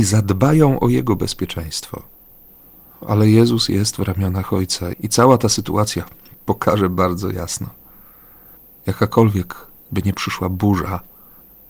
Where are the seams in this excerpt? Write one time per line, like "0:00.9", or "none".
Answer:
0:04.9